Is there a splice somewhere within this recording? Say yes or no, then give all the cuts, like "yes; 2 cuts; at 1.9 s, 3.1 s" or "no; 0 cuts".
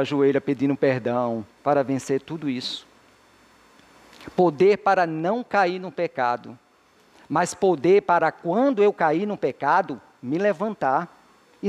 yes; 1 cut; at 1.6 s